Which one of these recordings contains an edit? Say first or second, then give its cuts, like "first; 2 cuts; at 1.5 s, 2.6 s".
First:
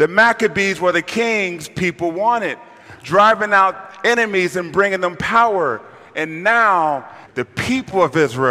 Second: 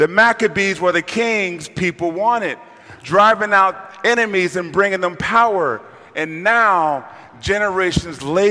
first; 1 cut; at 7.3 s